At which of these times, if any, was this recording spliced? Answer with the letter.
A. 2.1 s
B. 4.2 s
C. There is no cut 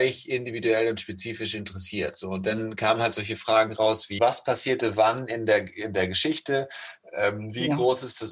B